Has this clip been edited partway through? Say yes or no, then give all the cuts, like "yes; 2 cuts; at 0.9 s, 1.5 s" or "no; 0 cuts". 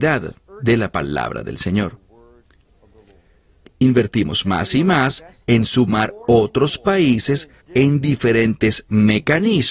yes; 2 cuts; at 3.7 s, 7.6 s